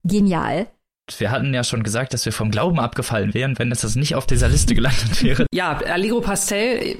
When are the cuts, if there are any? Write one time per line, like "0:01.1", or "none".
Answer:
0:05.5